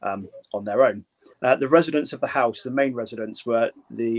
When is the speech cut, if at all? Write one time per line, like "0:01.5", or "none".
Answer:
0:01.3